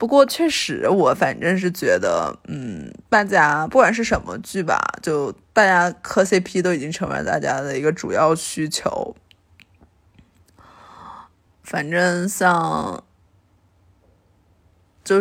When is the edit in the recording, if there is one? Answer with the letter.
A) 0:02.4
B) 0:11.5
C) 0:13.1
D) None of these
D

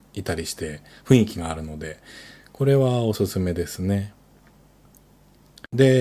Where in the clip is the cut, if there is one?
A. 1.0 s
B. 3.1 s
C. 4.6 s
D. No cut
D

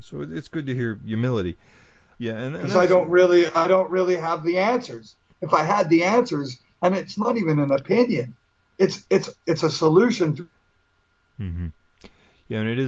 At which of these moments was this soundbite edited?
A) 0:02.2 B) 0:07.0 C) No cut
A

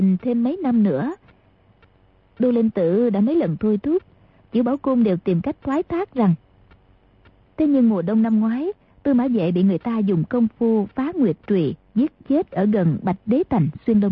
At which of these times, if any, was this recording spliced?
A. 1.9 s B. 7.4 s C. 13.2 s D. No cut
B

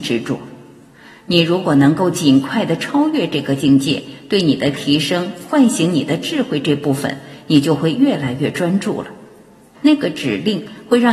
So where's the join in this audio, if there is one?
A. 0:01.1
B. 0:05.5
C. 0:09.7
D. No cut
C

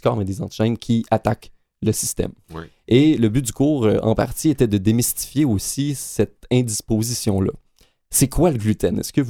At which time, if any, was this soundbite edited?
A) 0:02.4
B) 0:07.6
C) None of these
A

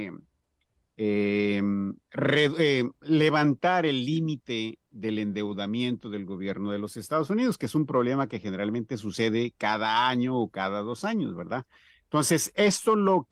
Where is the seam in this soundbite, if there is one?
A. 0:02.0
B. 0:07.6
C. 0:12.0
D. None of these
A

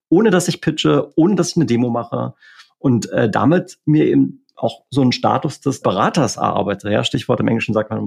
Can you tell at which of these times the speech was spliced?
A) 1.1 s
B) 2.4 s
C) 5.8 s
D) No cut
C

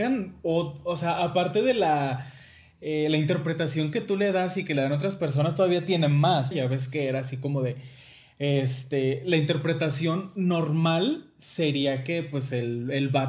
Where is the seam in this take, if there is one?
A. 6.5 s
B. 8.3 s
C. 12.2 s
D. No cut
A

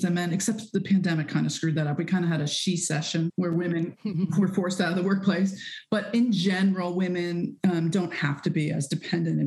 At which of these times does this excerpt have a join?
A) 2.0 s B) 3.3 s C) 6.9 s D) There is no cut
B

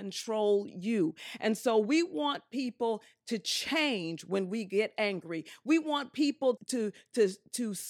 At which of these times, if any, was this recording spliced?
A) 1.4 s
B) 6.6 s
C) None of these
B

